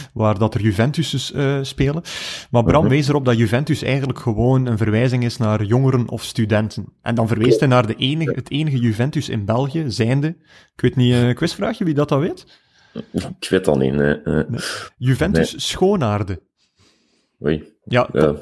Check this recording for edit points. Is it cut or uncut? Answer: uncut